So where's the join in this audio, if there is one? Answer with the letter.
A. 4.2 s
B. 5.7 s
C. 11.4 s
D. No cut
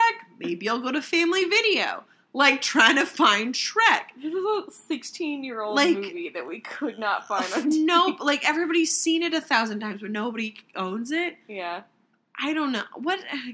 D